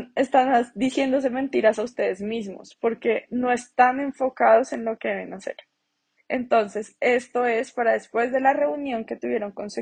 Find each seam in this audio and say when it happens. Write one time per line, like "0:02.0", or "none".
0:06.2